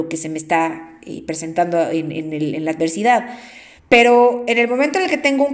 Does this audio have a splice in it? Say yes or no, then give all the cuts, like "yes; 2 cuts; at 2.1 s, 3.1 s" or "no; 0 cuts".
yes; 1 cut; at 3.8 s